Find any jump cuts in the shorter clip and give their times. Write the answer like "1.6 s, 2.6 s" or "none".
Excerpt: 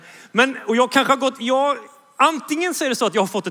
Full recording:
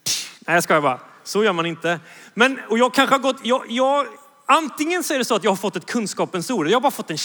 1.4 s

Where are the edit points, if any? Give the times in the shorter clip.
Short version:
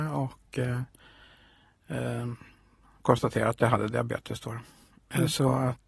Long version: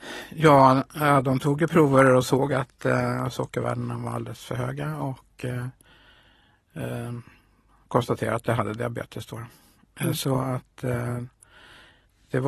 none

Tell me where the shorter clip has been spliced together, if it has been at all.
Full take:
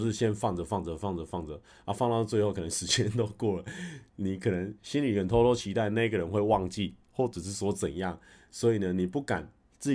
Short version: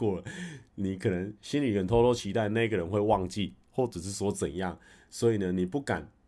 none

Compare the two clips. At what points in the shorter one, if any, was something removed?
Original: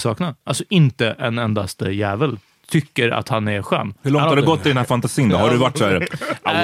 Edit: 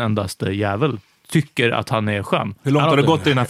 none

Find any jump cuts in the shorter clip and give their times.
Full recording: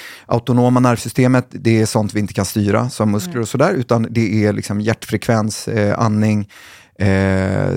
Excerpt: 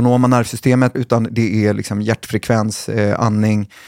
0.9 s

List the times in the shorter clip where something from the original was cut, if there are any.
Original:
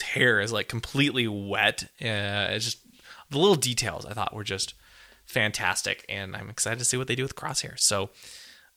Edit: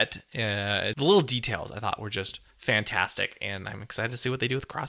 0.9 s, 2.5 s

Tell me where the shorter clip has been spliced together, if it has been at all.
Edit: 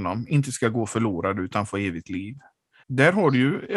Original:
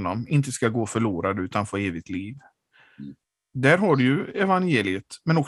2.8 s

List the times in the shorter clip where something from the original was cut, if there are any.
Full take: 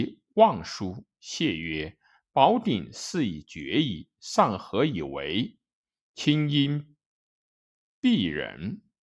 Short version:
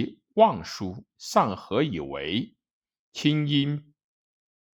1.1 s

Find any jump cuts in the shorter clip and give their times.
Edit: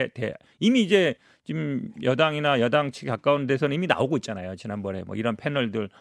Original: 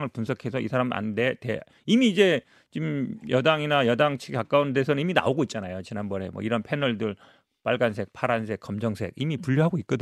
none

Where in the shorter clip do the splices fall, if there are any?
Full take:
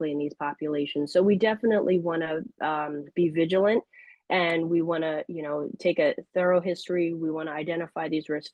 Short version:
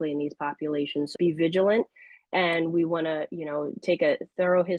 1.1 s

